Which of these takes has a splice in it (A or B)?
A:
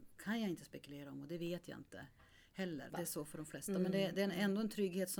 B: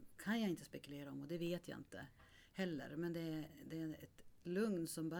A